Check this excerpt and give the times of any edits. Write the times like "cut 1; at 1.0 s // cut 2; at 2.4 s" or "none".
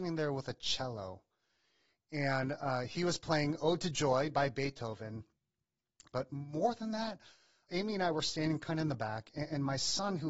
cut 1; at 6.1 s // cut 2; at 7.7 s